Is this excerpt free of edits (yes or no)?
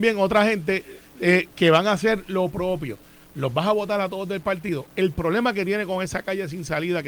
yes